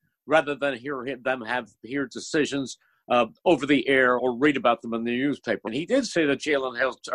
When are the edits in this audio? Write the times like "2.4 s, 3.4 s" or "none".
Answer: 4.2 s, 5.7 s